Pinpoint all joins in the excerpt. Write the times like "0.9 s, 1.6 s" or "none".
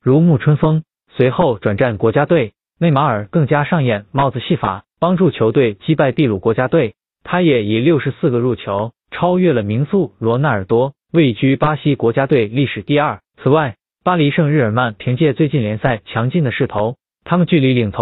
1.0 s, 13.3 s